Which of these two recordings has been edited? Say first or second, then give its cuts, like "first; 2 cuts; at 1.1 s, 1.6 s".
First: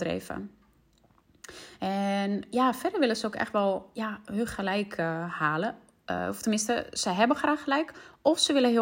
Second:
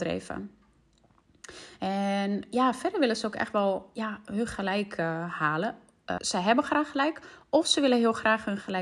second; 1 cut; at 6.2 s